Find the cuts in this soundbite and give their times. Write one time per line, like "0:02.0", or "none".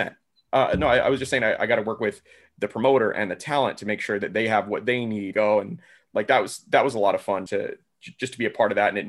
0:05.3
0:07.5